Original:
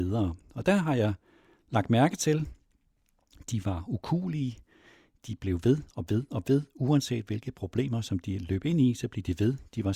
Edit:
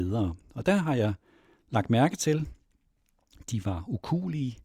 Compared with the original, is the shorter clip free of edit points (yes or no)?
yes